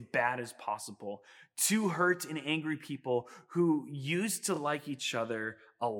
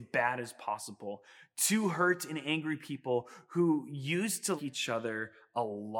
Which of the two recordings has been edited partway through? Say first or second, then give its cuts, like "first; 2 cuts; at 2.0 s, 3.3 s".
second; 1 cut; at 4.6 s